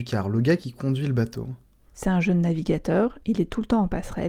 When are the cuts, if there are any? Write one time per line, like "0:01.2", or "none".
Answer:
none